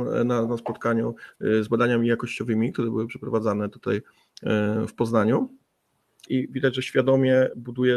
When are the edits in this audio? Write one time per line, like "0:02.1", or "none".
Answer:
0:06.3